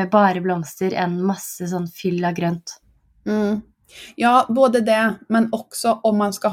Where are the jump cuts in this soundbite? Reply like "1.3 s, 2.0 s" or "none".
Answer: none